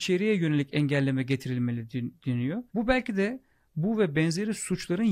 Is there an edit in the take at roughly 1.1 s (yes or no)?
no